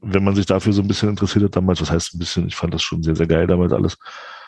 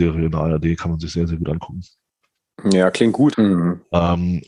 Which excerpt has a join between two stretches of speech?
second; 1 cut; at 3.3 s

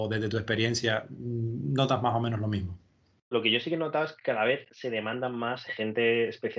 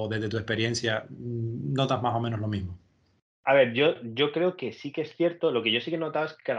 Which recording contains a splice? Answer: first; 2 cuts; at 3.3 s, 5.7 s

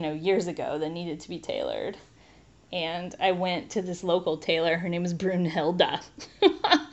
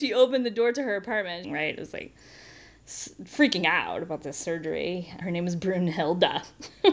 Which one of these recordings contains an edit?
second; 2 cuts; at 1.4 s, 5.2 s

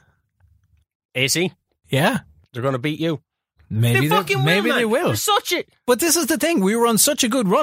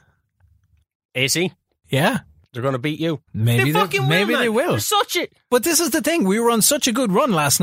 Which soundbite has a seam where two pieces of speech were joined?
second; 1 cut; at 3.3 s

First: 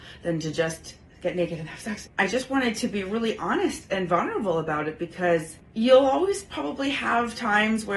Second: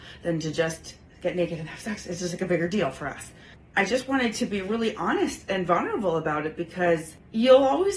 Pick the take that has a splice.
first; 1 cut; at 2.0 s

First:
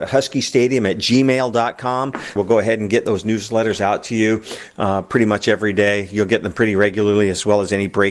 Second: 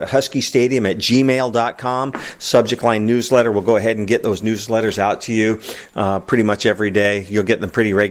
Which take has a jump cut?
first; 1 cut; at 2.4 s

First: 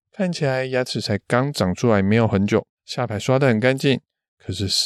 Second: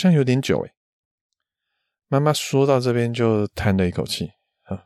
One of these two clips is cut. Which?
first; 1 cut; at 2.8 s

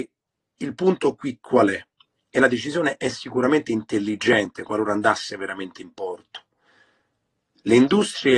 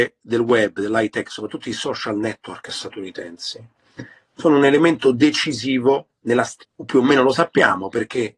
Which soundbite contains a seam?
second; 1 cut; at 6.6 s

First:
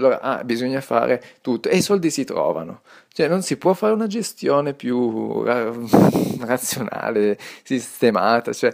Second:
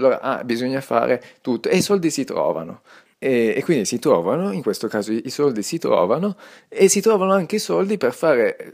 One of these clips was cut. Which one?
second; 1 cut; at 3.0 s

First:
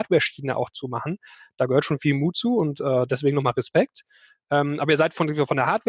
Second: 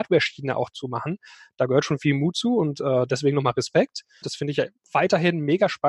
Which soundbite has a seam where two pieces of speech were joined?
second; 1 cut; at 4.2 s

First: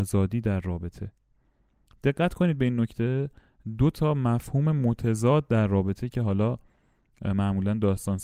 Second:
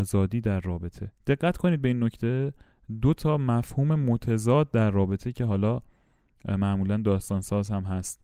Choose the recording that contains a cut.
second; 1 cut; at 1.2 s

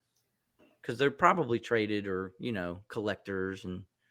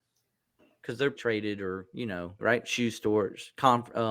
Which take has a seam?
second; 2 cuts; at 1.1 s, 2.4 s

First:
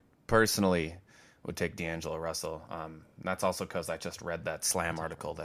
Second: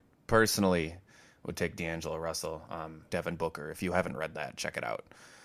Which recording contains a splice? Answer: second; 1 cut; at 3.1 s

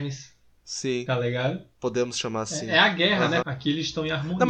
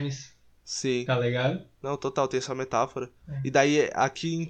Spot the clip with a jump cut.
first; 2 cuts; at 1.7 s, 3.4 s

